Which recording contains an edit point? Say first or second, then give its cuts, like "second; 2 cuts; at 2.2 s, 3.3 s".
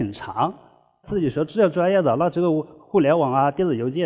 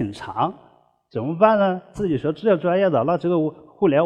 first; 1 cut; at 1.0 s